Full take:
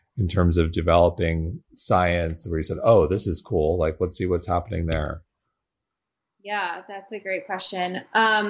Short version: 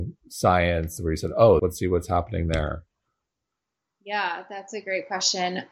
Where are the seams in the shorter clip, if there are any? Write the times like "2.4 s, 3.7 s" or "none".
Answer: 1.6 s